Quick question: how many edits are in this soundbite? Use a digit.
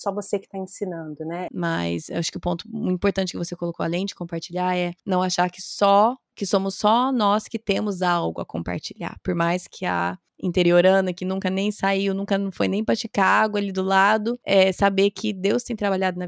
1